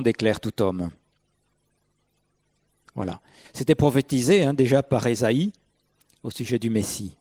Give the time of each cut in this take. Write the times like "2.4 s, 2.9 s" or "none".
3.4 s

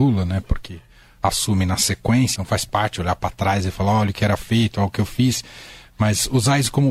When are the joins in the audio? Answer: 2.4 s

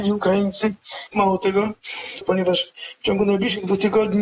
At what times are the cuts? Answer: 1.1 s, 2.2 s

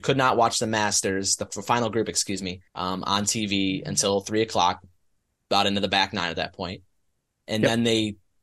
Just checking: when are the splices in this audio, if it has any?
2.7 s

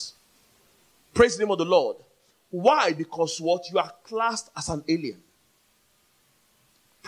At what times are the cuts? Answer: none

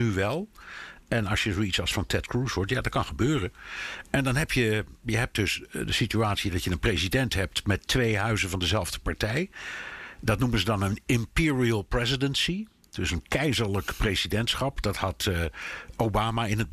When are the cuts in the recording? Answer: 5.0 s

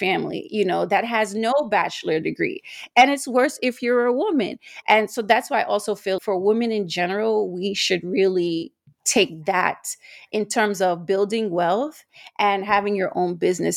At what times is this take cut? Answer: 4.8 s, 6.2 s

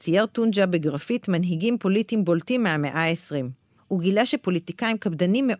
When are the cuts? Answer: 3.8 s

